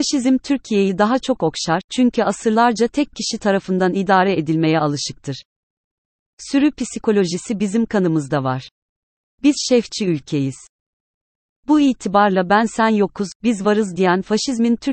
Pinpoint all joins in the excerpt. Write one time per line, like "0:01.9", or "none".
0:09.3